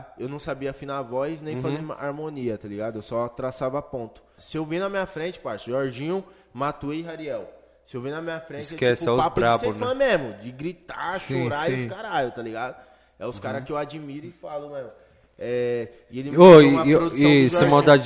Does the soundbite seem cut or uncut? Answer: cut